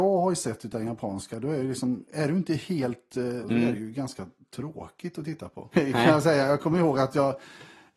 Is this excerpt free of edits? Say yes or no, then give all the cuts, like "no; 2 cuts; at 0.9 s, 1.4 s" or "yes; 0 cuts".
no; 2 cuts; at 3.4 s, 5.7 s